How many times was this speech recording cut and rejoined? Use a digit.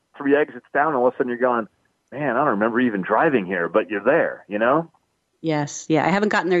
0